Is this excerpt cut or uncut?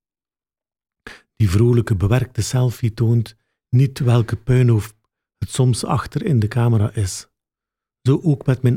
uncut